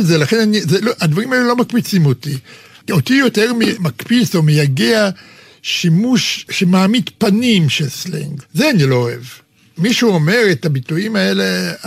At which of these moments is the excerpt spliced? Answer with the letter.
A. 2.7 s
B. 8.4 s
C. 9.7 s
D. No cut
B